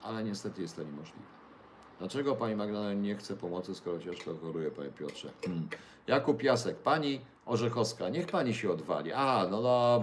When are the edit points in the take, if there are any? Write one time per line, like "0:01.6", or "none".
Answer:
0:01.9